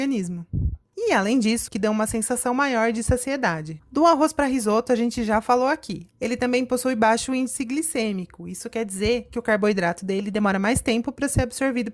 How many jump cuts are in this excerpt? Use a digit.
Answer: 2